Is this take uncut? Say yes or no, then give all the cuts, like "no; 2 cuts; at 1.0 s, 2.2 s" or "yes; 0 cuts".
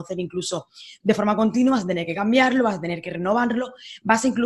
no; 1 cut; at 1.0 s